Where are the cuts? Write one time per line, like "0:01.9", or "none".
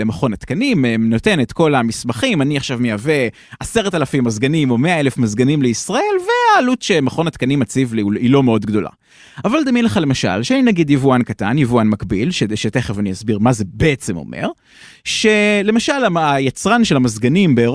none

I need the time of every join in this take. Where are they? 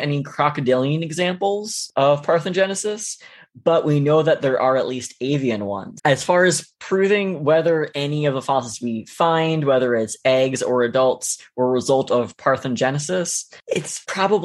0:06.0

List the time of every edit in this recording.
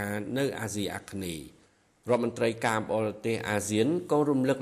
none

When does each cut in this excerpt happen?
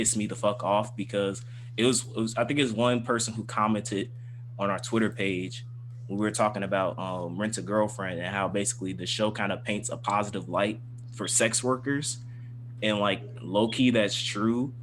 none

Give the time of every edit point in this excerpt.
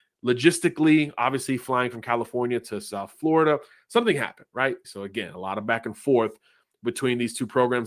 0:04.8

